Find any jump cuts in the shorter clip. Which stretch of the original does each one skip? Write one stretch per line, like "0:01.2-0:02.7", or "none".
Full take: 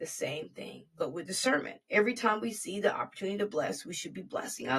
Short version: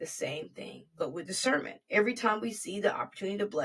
none